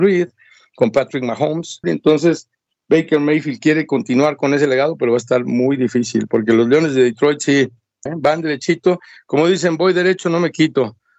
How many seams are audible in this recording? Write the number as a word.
two